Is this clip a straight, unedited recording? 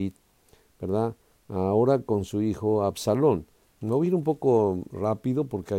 no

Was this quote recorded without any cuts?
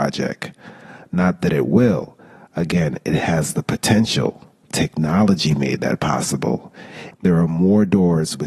no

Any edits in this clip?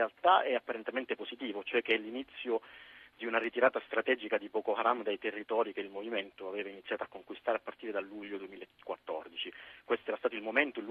no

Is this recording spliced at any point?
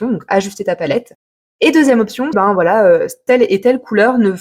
yes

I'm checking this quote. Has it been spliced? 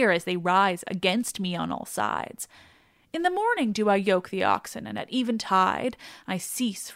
no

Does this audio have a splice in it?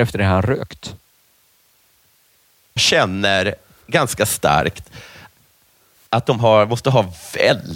yes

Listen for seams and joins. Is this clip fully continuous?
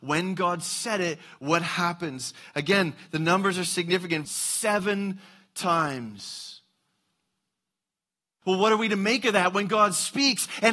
no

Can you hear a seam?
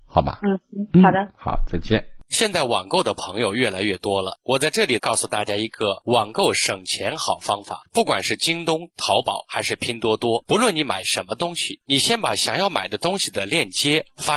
no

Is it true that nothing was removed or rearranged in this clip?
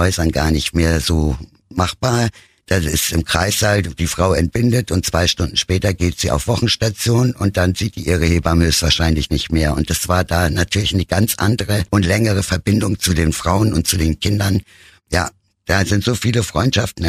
yes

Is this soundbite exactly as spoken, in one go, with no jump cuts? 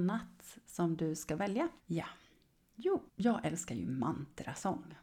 no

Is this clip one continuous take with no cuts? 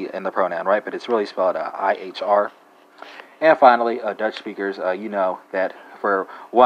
yes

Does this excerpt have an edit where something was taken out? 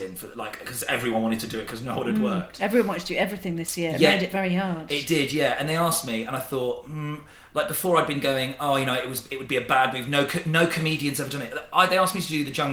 no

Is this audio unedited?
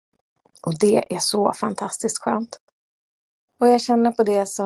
no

